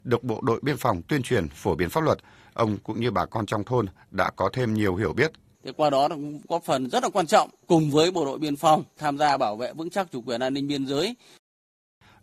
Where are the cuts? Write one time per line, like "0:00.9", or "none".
0:05.5

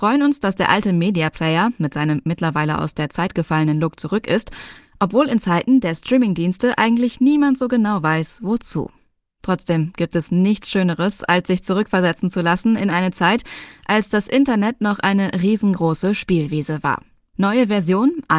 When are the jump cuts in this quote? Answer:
0:17.3

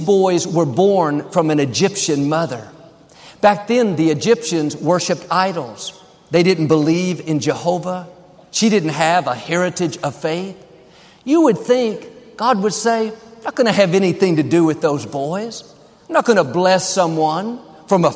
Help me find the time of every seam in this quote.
none

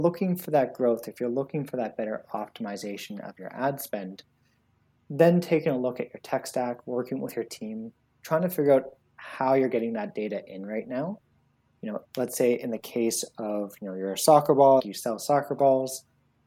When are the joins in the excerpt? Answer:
0:12.0
0:14.8

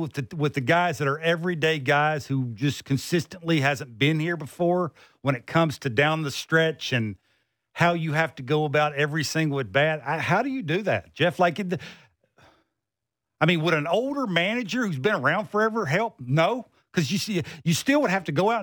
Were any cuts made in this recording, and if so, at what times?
none

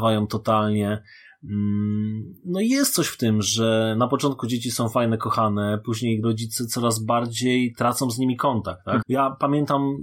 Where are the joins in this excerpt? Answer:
0:06.2
0:09.0

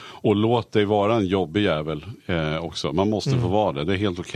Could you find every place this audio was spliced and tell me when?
none

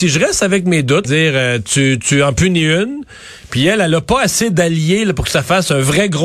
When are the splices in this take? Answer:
0:01.0

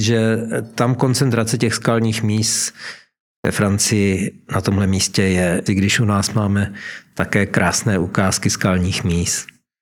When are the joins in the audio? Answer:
0:05.7

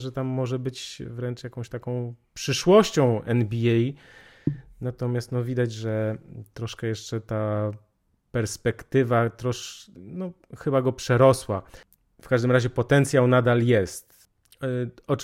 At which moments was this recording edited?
none

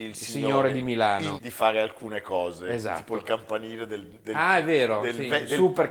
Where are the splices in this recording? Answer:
0:01.4

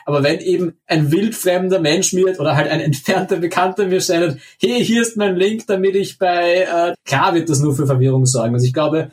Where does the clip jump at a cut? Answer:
0:06.9

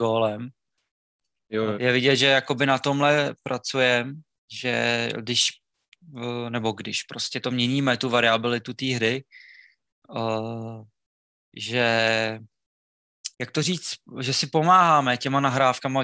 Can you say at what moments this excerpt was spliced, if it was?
0:01.7
0:13.3

